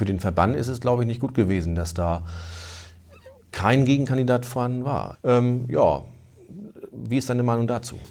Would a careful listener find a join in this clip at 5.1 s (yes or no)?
yes